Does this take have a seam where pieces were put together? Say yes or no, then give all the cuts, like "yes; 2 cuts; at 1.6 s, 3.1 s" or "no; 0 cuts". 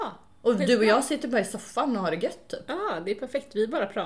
no; 0 cuts